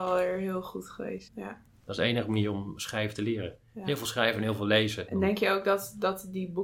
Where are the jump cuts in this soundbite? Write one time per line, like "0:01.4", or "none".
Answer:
0:01.3